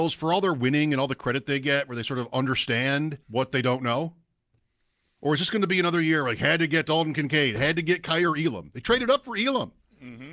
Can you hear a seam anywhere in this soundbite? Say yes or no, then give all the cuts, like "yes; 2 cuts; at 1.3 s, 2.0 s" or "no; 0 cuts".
yes; 1 cut; at 3.2 s